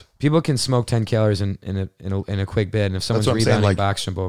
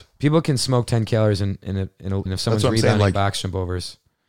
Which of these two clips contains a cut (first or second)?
second